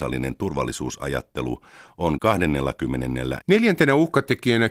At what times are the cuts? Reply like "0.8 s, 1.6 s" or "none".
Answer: 3.4 s